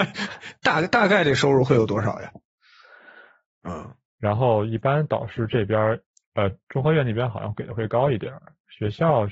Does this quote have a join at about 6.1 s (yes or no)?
no